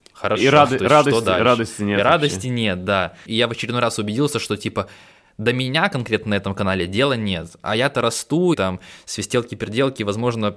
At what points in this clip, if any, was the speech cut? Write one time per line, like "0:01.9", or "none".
0:03.3
0:08.5